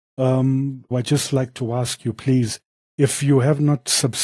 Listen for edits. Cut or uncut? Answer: cut